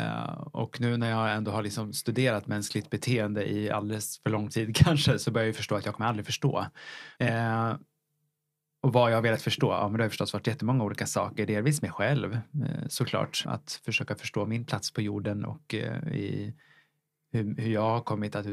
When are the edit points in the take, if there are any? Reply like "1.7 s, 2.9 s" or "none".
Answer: 7.2 s, 13.4 s